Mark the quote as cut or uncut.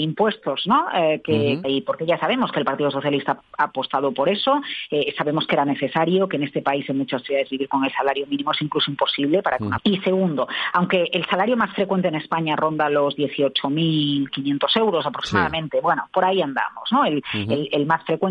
cut